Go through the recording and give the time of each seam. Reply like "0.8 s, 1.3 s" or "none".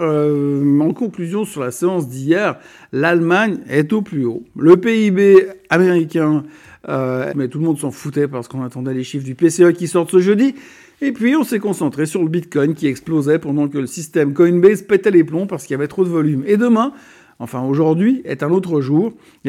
7.3 s